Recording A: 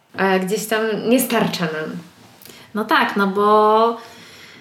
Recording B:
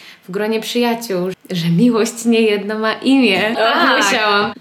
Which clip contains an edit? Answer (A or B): B